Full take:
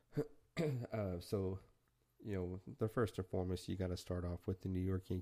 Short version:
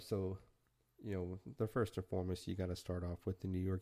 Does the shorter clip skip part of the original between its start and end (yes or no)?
no